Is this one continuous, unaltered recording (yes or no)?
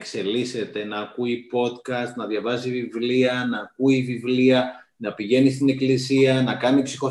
yes